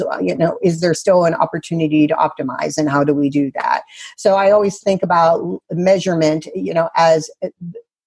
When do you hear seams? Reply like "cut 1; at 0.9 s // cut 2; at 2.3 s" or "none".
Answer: none